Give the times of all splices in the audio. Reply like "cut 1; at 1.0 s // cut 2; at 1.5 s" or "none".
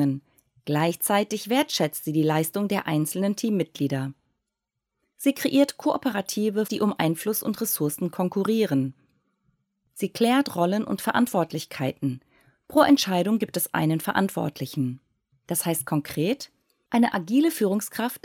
cut 1; at 6.7 s // cut 2; at 15.3 s